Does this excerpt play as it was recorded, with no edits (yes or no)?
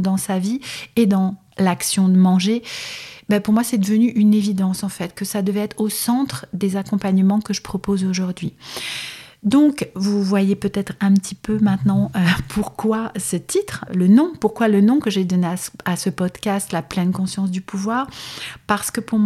no